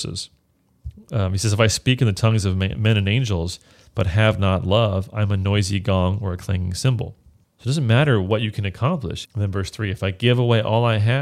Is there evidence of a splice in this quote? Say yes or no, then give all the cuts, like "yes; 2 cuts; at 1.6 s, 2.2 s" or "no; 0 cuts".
yes; 2 cuts; at 7.4 s, 9.2 s